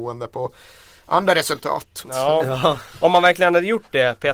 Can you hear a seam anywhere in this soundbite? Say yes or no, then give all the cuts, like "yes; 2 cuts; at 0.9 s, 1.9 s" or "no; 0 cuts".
yes; 1 cut; at 2.0 s